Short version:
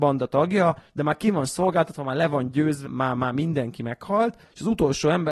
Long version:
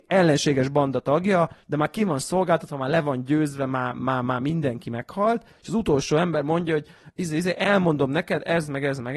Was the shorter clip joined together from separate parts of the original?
yes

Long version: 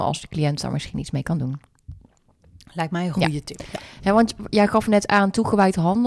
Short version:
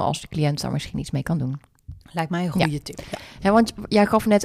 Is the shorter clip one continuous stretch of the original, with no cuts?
no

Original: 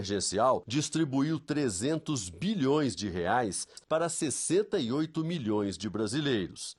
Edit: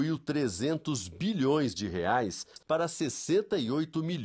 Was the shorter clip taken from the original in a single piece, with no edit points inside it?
yes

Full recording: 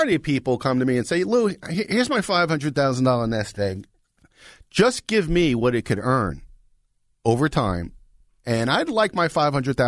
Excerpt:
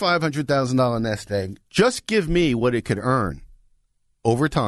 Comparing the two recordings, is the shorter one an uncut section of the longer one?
no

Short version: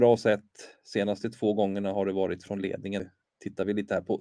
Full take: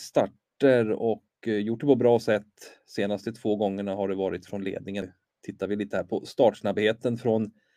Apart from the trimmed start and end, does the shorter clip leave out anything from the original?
no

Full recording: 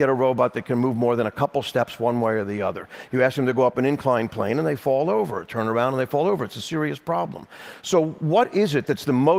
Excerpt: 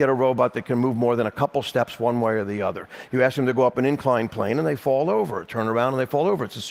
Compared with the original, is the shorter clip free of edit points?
yes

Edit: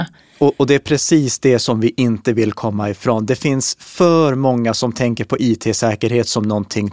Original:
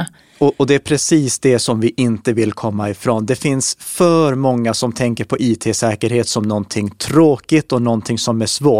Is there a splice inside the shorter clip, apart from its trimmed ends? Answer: no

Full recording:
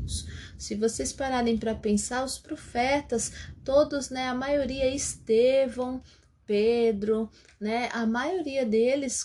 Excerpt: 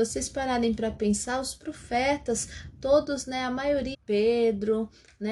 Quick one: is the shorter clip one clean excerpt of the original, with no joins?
no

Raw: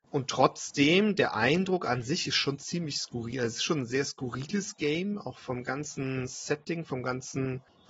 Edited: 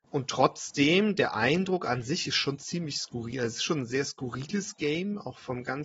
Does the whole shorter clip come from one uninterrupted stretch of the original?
yes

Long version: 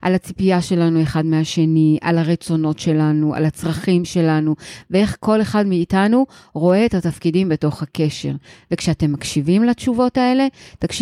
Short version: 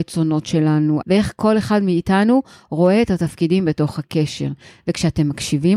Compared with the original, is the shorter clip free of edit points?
no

